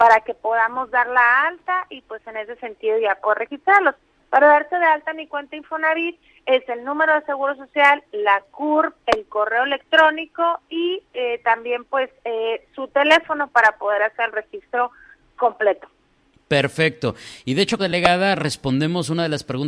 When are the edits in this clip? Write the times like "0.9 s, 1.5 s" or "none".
17.8 s